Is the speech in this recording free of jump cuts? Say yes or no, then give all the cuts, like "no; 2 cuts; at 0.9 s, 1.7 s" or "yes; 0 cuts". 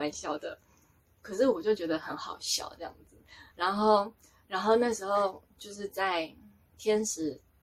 yes; 0 cuts